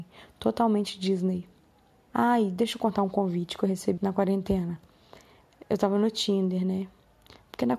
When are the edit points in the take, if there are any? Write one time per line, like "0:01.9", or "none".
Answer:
0:02.1
0:04.0